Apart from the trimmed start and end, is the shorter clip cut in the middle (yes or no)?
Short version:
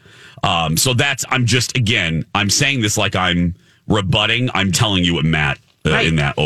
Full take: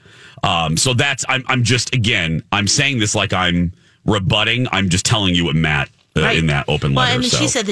yes